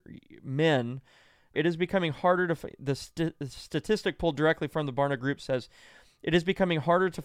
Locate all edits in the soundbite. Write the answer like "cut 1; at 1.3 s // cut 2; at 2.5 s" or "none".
cut 1; at 1.5 s